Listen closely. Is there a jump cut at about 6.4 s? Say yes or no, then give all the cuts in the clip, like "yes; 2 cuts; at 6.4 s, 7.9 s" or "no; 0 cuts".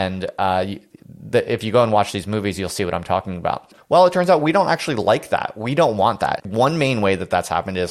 yes; 2 cuts; at 3.8 s, 6.4 s